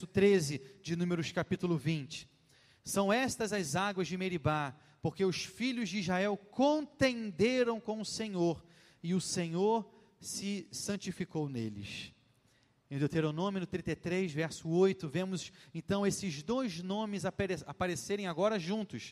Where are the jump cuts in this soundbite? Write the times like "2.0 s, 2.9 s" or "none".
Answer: none